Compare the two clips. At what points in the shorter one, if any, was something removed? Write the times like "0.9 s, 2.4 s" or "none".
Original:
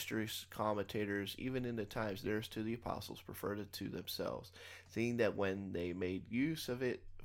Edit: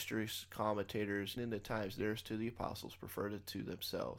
1.4 s